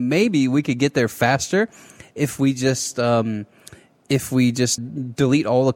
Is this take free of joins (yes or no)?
no